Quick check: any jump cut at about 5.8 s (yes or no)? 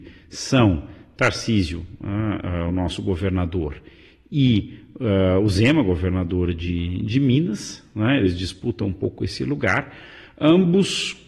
no